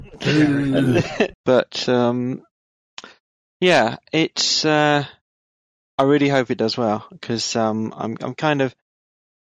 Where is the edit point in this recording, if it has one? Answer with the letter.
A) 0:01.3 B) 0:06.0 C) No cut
A